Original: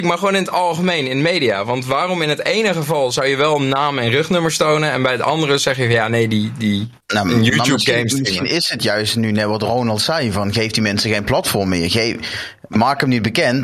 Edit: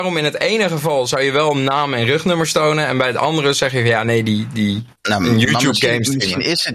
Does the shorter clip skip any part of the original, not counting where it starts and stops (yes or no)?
no